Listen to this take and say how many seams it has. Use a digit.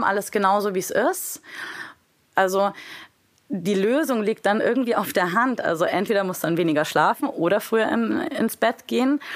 1